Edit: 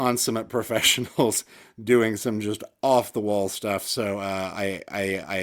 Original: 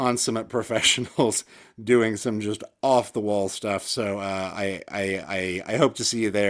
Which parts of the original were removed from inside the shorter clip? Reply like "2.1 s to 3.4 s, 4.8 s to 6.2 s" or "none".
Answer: none